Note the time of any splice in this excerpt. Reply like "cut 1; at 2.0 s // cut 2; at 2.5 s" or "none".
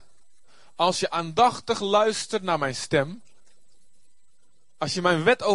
none